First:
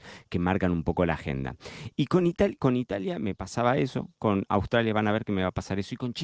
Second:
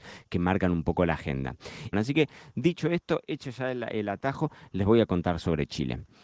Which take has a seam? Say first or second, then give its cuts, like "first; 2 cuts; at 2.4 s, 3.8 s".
second; 1 cut; at 1.9 s